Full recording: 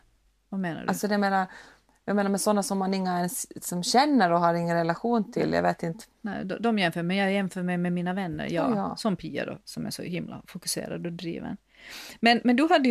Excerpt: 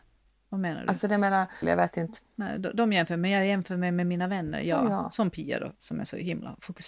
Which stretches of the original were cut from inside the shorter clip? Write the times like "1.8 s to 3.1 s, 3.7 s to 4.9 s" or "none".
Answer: 1.6 s to 5.5 s